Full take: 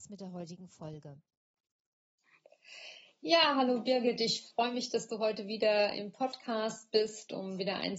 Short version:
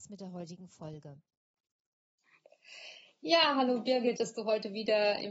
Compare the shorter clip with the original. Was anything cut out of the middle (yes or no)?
yes